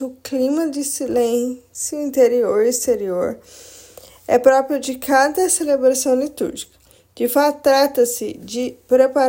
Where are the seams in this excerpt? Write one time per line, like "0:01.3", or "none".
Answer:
none